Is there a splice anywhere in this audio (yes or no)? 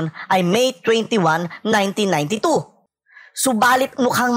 no